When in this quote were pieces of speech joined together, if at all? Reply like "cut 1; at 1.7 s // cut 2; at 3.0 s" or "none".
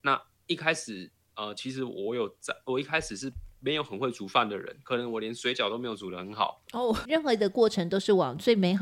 cut 1; at 7.1 s